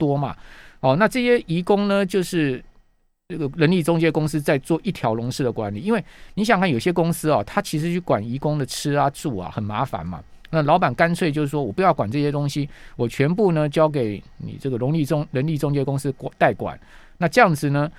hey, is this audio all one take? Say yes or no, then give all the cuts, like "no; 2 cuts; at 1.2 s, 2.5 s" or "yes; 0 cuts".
yes; 0 cuts